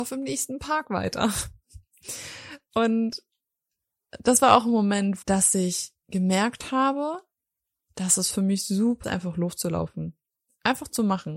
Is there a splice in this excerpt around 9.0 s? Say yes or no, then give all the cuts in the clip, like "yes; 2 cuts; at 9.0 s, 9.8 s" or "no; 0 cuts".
yes; 2 cuts; at 5.2 s, 9.0 s